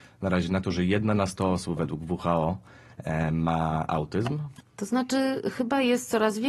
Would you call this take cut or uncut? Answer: cut